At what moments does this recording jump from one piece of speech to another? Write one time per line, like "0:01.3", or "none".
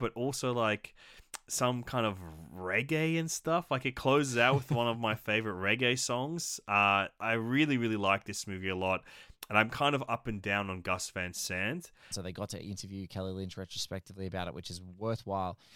0:12.1